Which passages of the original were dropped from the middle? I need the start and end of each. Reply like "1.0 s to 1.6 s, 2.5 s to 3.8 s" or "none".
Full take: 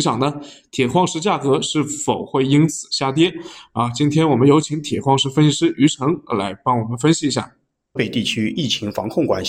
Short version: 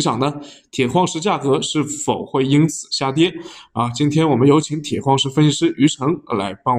none